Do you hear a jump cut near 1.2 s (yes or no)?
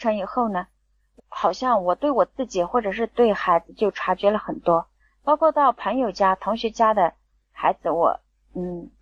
yes